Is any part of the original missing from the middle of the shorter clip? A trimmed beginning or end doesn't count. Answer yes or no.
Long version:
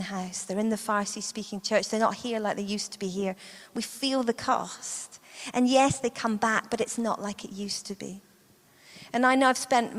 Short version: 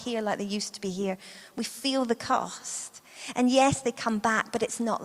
no